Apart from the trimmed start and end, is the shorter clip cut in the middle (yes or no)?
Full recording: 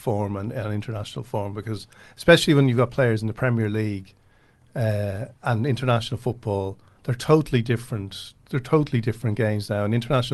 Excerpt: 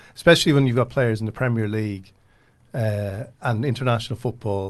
no